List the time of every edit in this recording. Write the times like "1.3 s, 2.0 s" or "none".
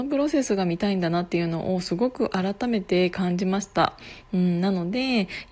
none